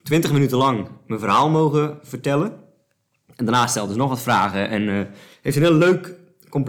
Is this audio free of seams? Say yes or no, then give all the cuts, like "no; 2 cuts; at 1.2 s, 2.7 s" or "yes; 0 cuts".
yes; 0 cuts